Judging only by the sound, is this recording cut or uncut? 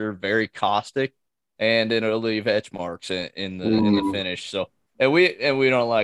uncut